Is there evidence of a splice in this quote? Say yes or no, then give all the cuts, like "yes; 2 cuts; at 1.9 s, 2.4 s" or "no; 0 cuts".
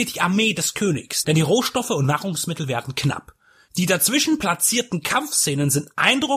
yes; 2 cuts; at 1.2 s, 3.7 s